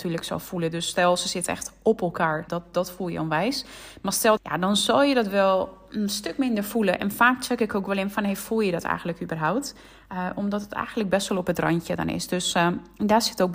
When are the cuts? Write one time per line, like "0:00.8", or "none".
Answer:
0:02.5
0:04.4